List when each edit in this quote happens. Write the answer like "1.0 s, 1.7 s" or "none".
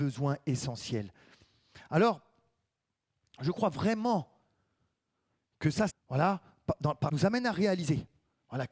5.9 s, 7.1 s